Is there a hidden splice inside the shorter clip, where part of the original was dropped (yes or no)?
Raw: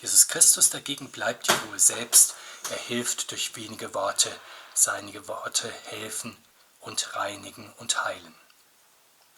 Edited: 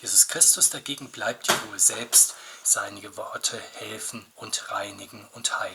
yes